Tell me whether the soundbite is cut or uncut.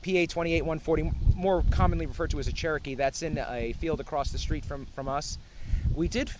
uncut